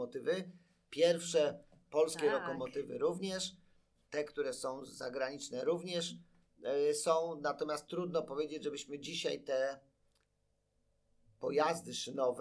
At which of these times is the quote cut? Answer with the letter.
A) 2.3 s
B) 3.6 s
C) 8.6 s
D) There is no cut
D